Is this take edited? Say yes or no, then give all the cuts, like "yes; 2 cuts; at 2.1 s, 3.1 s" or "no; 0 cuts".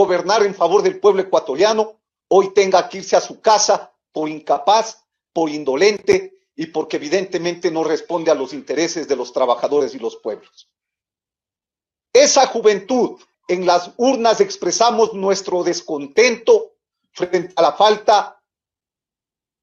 yes; 1 cut; at 13.3 s